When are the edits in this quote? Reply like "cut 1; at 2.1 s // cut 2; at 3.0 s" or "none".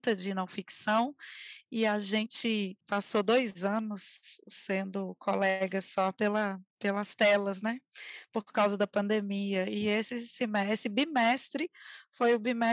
none